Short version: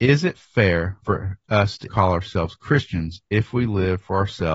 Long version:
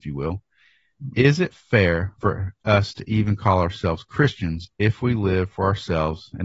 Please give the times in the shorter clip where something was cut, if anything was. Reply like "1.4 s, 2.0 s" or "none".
1.9 s